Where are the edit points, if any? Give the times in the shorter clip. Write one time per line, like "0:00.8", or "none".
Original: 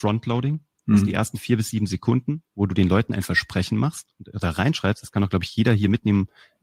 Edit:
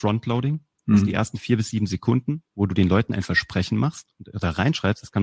none